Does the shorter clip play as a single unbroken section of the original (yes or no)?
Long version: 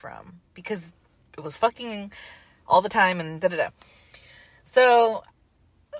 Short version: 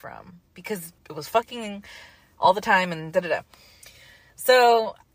no